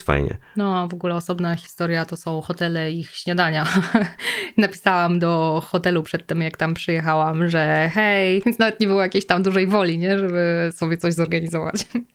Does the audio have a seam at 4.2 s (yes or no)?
no